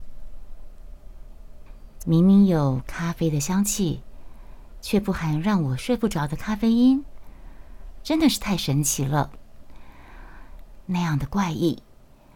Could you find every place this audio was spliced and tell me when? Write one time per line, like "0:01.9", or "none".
0:02.0
0:10.8